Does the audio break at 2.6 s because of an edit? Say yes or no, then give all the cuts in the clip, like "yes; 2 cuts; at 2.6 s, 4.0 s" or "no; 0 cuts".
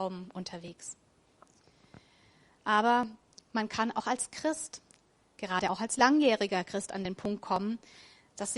no; 0 cuts